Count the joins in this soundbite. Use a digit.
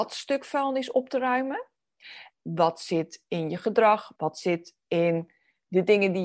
2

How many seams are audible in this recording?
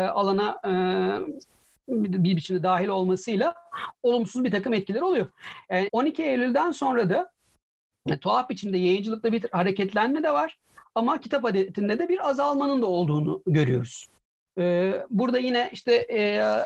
1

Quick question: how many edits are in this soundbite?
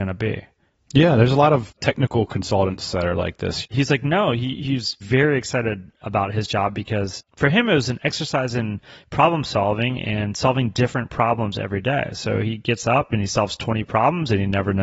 1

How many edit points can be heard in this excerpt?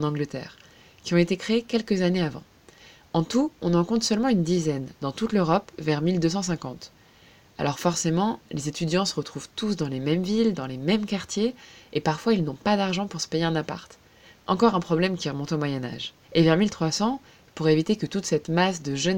1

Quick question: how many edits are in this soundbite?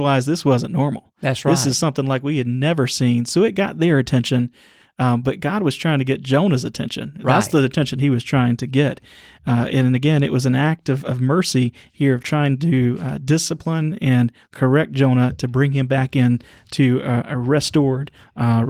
0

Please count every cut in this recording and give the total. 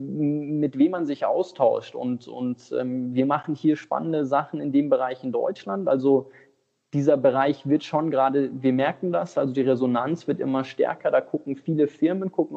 0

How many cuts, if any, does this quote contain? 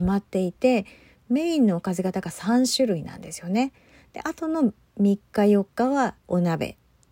0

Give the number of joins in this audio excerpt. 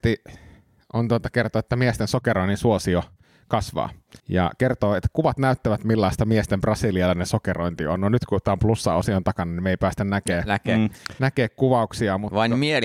1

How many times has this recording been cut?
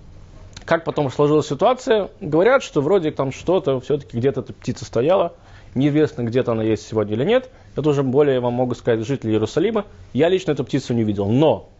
1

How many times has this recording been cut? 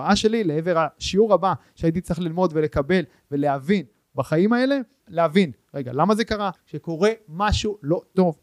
2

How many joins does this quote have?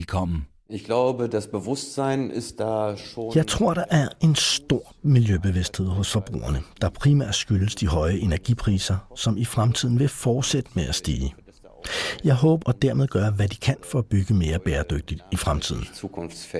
1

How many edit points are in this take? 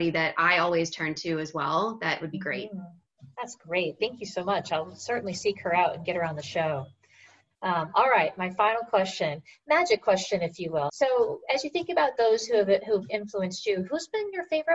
2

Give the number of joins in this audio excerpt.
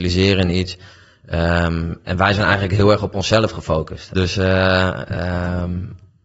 1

